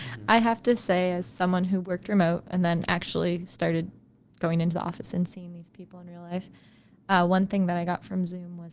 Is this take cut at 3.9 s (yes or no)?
no